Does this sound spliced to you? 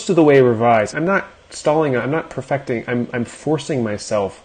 yes; 1 cut; at 0.9 s

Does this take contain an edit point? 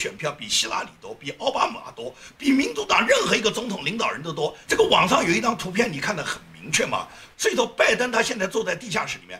yes; 2 cuts; at 4.7 s, 7.3 s

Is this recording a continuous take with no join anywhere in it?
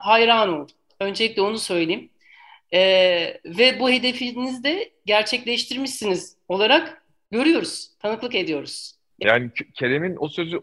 no; 1 cut; at 9.2 s

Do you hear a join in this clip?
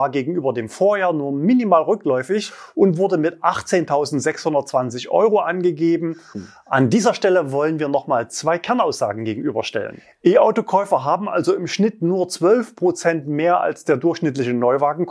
yes; 1 cut; at 6.3 s

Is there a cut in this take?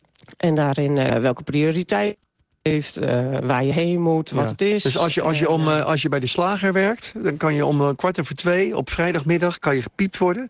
yes; 1 cut; at 1.1 s

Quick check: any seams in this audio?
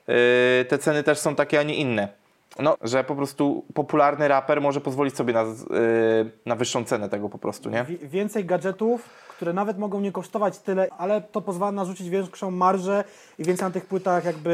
yes; 2 cuts; at 2.8 s, 10.9 s

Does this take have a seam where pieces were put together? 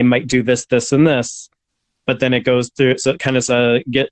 no; 0 cuts

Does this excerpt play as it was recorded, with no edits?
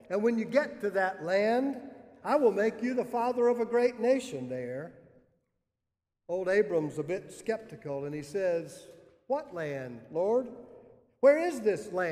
yes; 0 cuts

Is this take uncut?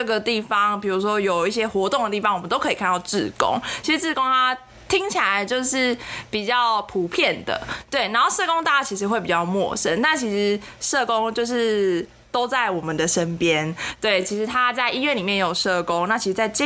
yes; 0 cuts

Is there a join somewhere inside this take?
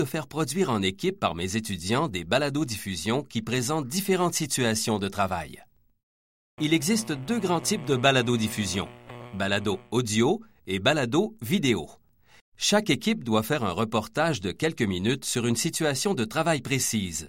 yes; 2 cuts; at 6.6 s, 12.4 s

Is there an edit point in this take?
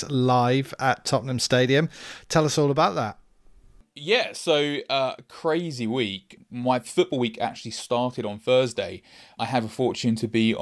no; 0 cuts

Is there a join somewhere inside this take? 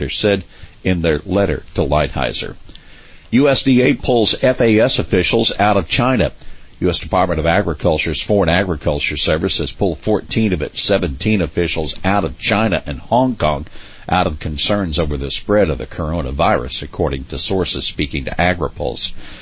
no; 0 cuts

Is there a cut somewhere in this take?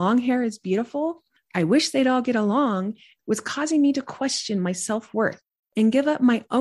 yes; 1 cut; at 3.2 s

